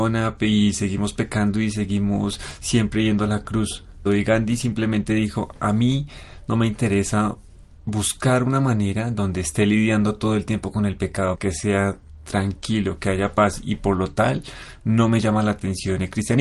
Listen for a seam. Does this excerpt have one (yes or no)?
yes